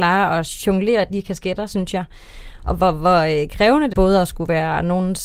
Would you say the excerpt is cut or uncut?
cut